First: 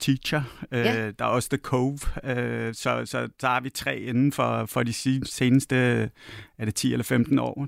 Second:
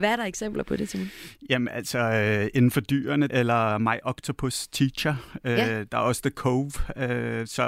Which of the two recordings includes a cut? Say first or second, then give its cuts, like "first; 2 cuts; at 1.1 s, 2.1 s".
second; 1 cut; at 3.3 s